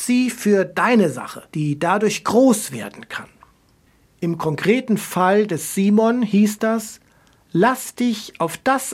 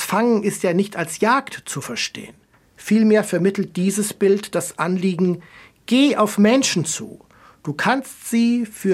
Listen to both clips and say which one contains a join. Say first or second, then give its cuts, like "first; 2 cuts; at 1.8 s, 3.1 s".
first; 1 cut; at 1.5 s